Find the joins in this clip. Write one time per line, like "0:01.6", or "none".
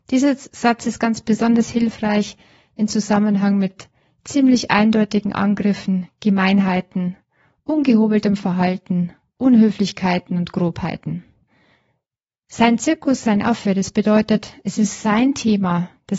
none